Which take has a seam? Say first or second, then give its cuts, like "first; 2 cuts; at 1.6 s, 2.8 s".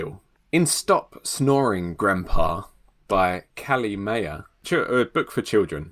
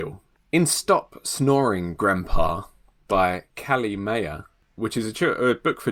first; 1 cut; at 4.6 s